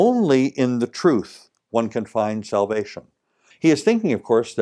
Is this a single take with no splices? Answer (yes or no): no